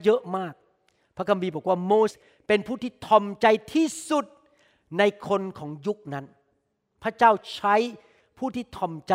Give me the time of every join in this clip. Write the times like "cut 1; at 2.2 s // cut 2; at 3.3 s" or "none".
cut 1; at 2.1 s